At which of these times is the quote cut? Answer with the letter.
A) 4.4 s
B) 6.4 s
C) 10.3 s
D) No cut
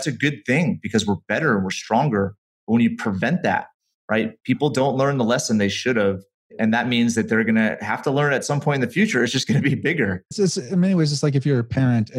C